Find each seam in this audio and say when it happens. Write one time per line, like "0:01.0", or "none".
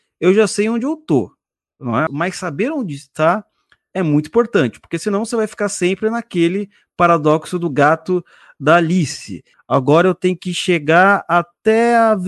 0:02.1
0:09.5